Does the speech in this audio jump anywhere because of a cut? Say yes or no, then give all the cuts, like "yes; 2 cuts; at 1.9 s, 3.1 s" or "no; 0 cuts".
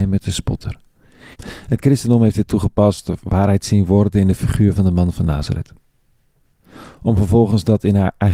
yes; 1 cut; at 1.3 s